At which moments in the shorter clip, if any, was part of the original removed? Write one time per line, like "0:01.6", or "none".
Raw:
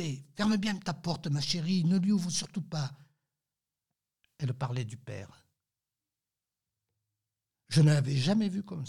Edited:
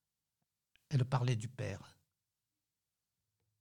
none